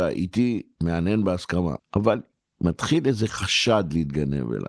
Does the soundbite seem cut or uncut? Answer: cut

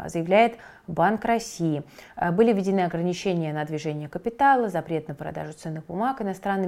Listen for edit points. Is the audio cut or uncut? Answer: uncut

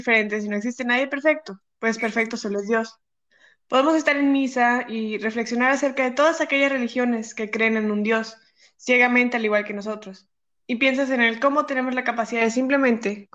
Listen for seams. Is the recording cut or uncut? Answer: uncut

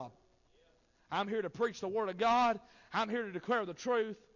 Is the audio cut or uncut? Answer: uncut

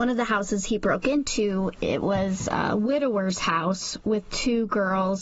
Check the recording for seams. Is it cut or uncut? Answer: uncut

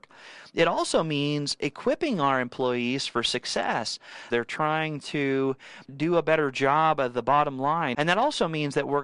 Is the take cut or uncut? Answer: cut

